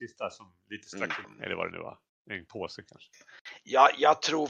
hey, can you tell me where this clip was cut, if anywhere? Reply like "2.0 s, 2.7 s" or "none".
1.2 s